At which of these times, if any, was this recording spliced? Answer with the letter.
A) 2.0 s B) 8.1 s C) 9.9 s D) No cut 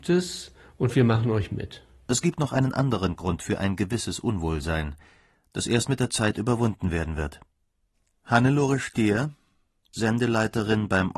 D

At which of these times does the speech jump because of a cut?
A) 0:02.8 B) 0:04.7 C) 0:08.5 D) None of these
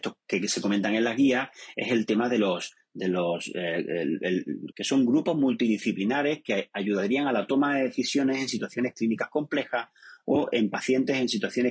B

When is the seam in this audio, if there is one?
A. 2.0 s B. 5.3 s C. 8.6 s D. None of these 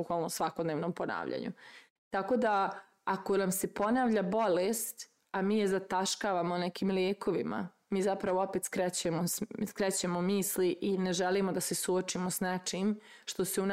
A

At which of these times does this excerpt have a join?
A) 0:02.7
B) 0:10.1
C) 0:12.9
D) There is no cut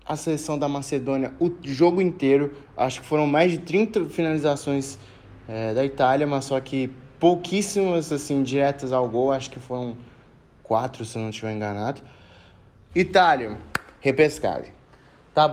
C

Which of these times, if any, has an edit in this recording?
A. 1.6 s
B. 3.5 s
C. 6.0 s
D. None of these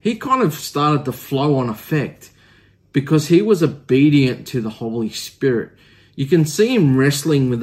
D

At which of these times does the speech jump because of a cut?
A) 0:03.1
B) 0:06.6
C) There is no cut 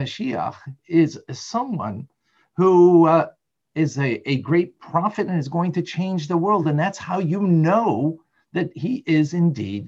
C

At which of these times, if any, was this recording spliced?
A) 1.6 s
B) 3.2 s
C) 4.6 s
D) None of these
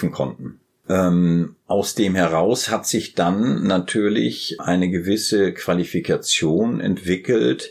C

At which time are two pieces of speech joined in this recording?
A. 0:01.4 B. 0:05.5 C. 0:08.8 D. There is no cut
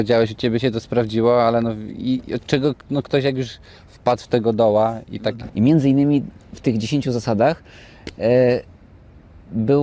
B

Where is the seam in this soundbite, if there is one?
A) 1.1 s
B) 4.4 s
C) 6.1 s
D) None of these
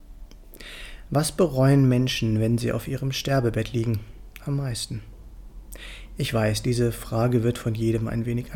D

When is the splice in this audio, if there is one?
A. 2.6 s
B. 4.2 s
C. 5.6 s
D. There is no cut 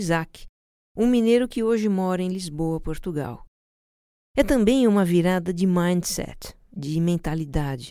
B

